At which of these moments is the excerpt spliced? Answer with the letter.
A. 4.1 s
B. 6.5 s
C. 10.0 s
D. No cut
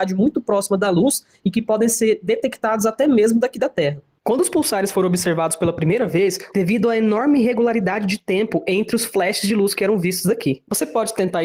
B